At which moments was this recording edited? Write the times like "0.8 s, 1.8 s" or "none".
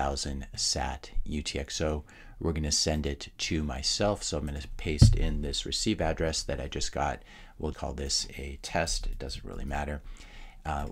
7.7 s